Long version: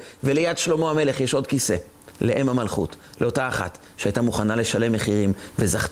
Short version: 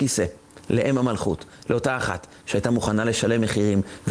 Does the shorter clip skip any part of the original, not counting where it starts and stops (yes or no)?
no